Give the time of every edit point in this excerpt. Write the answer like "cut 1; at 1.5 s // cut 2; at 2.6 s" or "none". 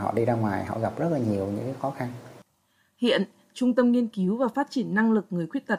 none